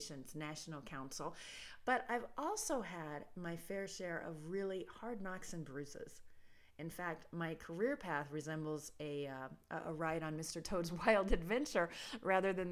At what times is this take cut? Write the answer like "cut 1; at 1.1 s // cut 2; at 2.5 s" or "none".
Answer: none